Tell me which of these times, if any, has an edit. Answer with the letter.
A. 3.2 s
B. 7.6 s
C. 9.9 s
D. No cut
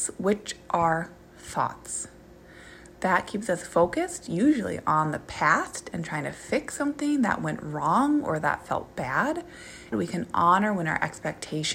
C